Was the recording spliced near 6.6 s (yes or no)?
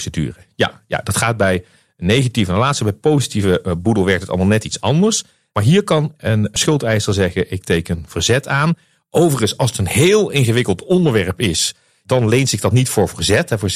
yes